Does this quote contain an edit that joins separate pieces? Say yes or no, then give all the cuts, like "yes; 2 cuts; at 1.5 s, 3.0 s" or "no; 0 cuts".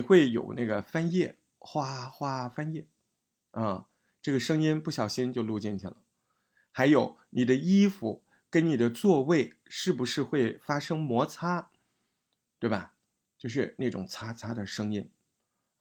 no; 0 cuts